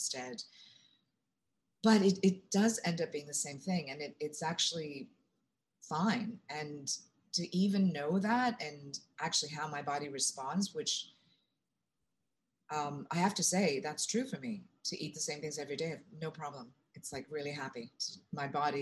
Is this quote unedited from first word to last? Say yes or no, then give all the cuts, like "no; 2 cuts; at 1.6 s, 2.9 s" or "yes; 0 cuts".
yes; 0 cuts